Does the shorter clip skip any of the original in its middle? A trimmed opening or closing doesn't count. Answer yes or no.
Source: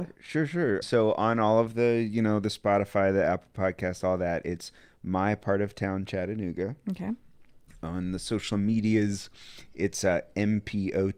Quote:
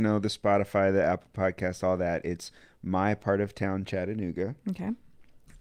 no